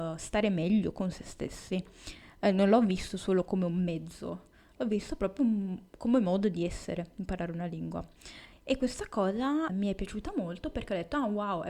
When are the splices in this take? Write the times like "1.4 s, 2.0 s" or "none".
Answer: 8.5 s, 9.7 s